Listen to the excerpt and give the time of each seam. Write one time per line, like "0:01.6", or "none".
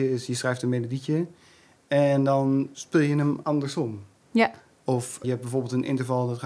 none